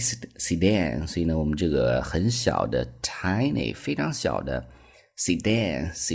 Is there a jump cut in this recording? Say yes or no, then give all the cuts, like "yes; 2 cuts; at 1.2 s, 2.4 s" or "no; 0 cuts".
no; 0 cuts